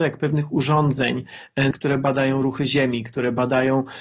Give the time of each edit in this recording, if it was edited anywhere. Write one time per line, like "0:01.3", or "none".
0:01.7